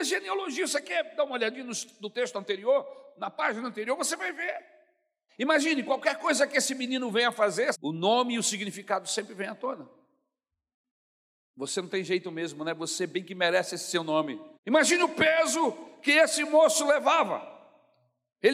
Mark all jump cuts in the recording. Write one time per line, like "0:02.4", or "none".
0:05.3
0:07.7
0:14.5